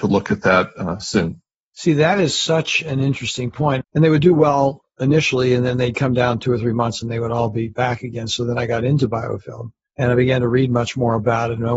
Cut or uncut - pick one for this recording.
cut